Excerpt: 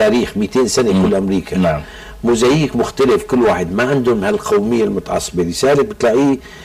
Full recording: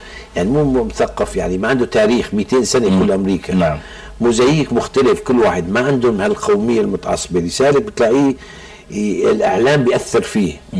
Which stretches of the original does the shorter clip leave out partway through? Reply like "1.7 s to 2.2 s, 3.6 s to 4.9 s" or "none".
none